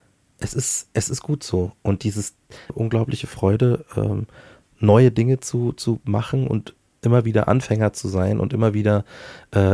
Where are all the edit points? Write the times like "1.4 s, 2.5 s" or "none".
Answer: 2.7 s